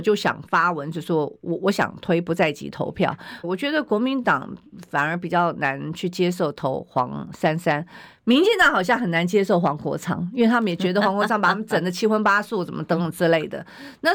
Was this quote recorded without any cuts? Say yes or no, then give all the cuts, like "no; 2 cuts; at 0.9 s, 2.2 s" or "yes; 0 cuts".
no; 1 cut; at 3.4 s